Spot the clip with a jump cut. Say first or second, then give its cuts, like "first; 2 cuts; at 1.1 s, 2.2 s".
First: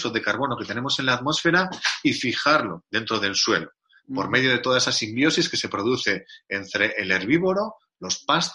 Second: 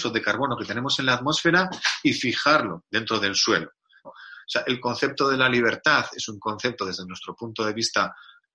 second; 1 cut; at 4.0 s